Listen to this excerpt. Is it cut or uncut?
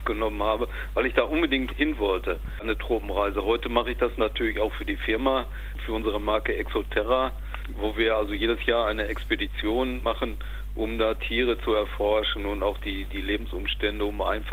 cut